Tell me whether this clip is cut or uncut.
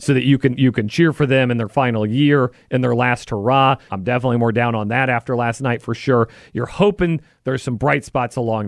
cut